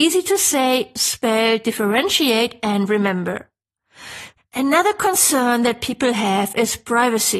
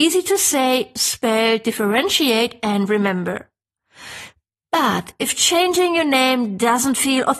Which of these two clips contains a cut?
first; 1 cut; at 4.4 s

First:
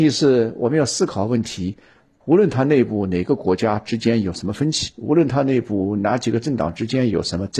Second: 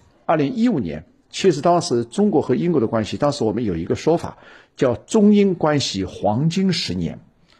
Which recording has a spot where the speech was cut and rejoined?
first; 1 cut; at 2.2 s

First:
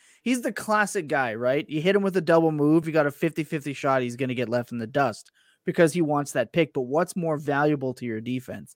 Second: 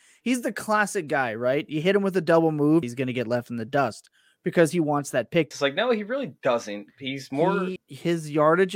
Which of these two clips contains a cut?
second; 3 cuts; at 2.8 s, 5.5 s, 7.8 s

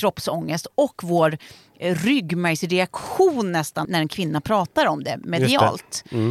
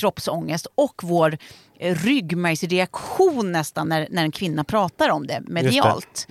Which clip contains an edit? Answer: first; 1 cut; at 3.8 s

